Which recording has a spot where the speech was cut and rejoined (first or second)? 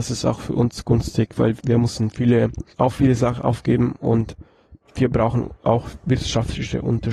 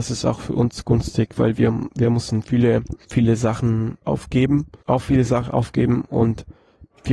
first